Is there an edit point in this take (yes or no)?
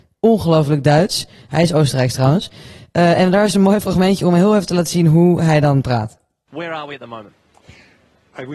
no